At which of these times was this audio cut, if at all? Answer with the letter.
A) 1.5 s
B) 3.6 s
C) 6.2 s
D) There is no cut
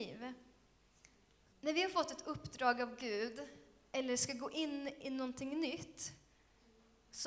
A